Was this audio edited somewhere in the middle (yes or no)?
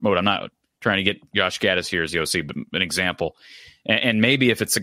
no